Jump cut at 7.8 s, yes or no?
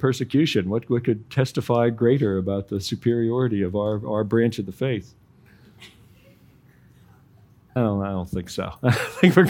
yes